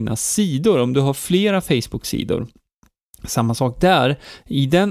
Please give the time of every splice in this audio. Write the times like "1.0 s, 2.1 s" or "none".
none